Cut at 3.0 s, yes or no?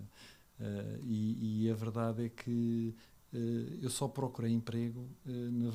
no